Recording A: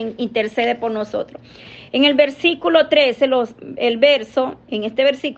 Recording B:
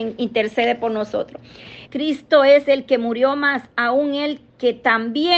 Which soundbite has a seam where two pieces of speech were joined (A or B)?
B